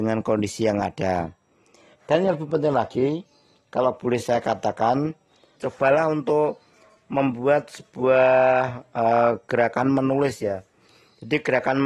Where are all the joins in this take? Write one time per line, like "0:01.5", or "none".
0:05.6